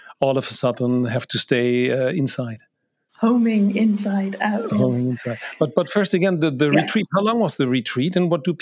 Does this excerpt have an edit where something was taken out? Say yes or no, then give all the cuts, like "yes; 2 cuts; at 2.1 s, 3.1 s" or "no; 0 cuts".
no; 0 cuts